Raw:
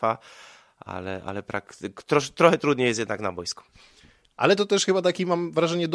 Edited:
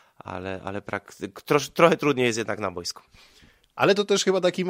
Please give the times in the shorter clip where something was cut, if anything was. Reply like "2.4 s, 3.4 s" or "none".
none